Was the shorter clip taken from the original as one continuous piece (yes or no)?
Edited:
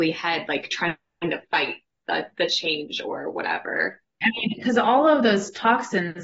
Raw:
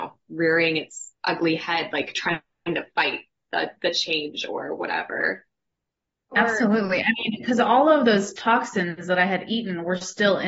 no